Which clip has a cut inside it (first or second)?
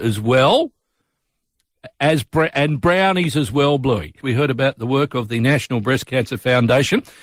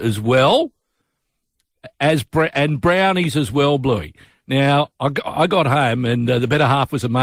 first